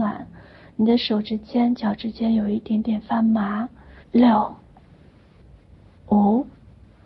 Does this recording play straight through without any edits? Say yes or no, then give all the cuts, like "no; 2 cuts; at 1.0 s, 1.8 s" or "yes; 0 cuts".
no; 1 cut; at 4.0 s